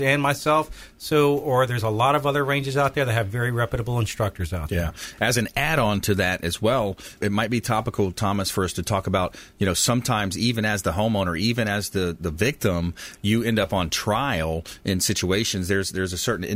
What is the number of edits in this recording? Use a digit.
1